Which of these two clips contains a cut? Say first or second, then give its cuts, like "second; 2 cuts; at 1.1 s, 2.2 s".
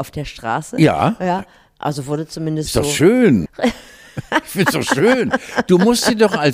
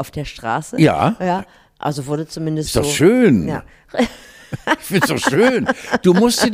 first; 1 cut; at 3.5 s